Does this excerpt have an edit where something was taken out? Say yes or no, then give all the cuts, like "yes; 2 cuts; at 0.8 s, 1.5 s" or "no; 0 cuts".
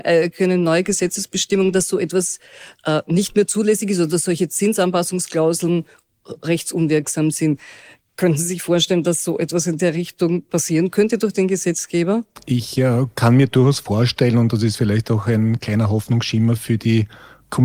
no; 0 cuts